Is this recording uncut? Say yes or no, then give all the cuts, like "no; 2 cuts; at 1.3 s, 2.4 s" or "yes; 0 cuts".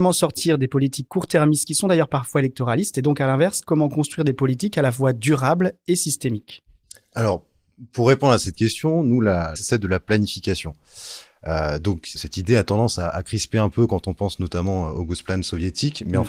no; 2 cuts; at 9.6 s, 12.2 s